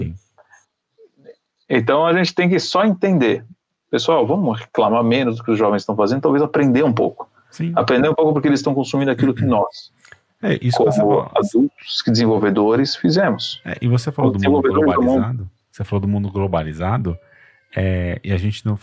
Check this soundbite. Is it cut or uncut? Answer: uncut